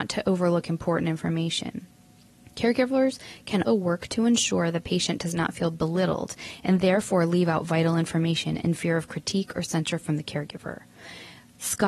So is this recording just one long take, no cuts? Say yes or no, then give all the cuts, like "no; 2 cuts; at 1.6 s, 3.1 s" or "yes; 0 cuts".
no; 1 cut; at 3.7 s